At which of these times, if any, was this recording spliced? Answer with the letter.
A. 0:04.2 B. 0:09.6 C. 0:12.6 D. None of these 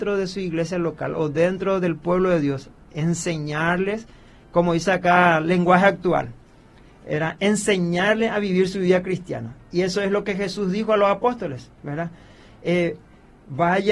D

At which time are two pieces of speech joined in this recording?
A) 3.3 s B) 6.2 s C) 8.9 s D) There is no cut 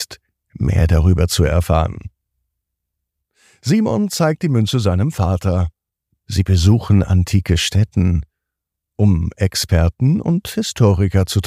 B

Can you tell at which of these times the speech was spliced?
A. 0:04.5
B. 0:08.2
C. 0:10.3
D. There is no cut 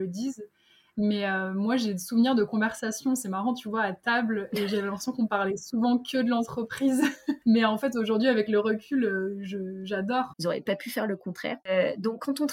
C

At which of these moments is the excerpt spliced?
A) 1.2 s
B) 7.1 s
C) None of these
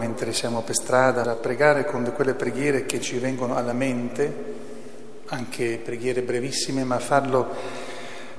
A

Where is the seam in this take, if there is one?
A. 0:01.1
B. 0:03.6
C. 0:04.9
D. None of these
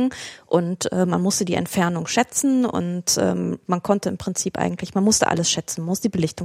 D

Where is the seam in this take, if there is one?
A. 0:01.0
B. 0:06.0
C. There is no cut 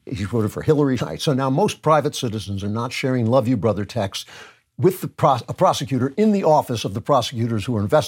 A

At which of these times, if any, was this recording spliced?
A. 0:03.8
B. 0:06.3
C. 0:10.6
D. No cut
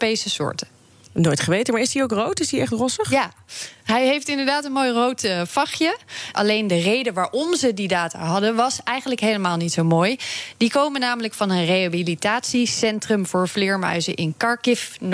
B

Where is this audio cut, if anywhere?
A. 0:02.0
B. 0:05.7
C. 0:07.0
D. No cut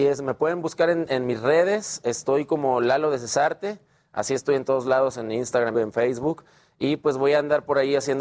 B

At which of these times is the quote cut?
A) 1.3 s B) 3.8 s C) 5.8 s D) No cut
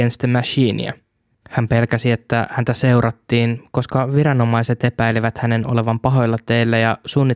A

